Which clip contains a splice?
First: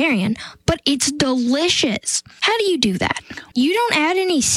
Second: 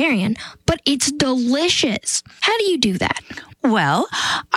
first; 1 cut; at 3.5 s

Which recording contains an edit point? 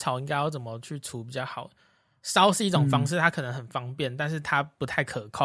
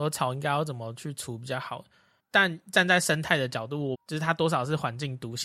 second; 2 cuts; at 2.2 s, 3.9 s

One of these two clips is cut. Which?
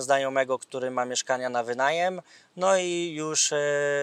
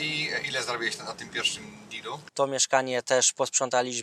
second; 1 cut; at 2.3 s

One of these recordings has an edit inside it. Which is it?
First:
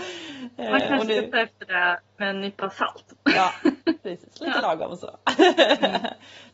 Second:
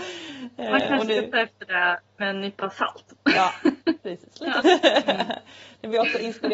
second; 1 cut; at 4.6 s

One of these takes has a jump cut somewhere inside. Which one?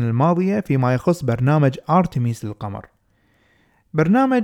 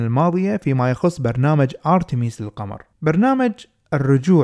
second; 1 cut; at 2.9 s

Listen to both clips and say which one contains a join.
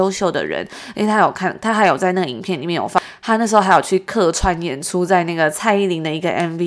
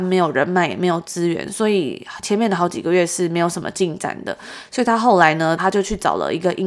second; 1 cut; at 5.6 s

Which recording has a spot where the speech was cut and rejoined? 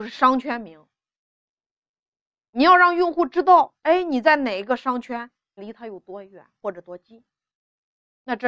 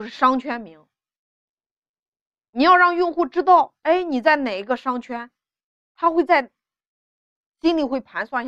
first; 1 cut; at 5.6 s

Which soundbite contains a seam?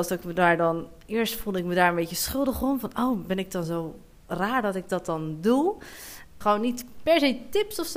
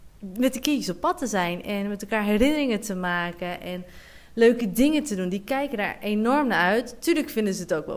first; 1 cut; at 6.4 s

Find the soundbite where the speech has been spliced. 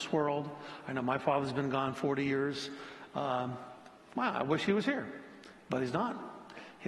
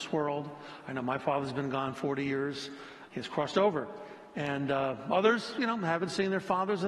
second; 1 cut; at 3.1 s

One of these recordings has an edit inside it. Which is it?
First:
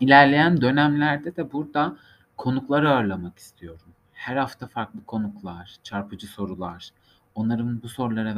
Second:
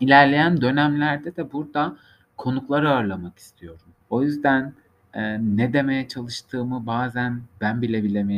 second; 1 cut; at 4.0 s

